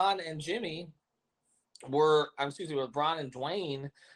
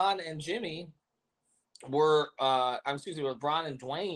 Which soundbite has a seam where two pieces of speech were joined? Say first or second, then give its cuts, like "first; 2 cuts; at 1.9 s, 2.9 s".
first; 1 cut; at 2.3 s